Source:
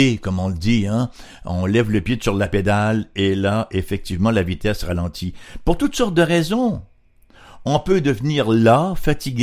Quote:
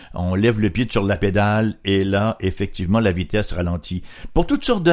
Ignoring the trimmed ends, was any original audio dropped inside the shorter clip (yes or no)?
no